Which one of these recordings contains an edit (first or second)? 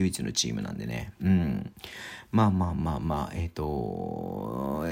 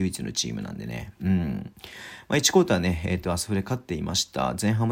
second